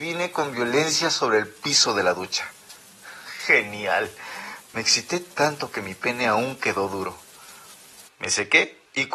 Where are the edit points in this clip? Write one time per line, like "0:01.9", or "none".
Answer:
0:04.6
0:08.1

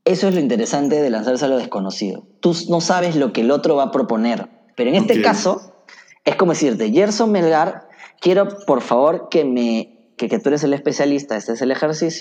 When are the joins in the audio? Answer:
0:04.7
0:10.2

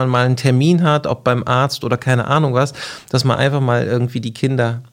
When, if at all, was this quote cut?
none

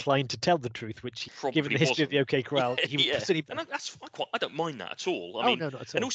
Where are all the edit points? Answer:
0:01.3
0:03.5

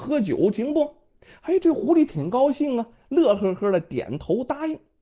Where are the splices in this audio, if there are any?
none

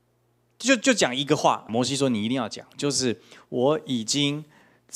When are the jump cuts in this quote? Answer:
0:01.7

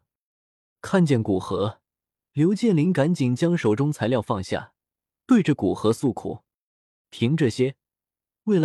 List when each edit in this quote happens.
0:05.1
0:07.0

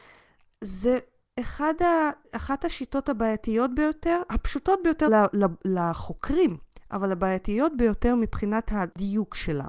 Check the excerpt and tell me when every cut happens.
0:05.1

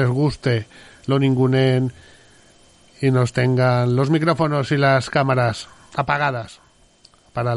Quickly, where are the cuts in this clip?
none

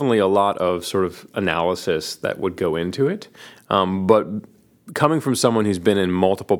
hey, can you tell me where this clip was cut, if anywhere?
none

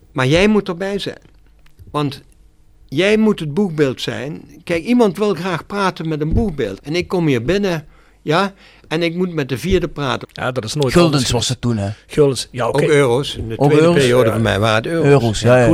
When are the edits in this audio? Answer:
0:06.8
0:10.2

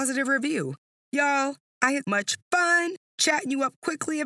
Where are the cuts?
0:01.0
0:02.0

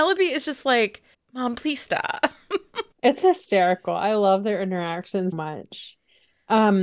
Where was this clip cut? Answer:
0:01.1
0:02.9
0:05.3

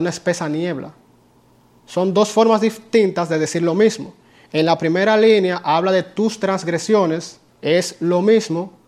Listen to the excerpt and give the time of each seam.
0:07.5

